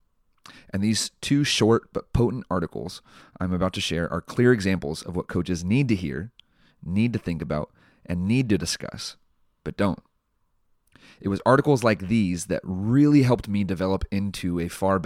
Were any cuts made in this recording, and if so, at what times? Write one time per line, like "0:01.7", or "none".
none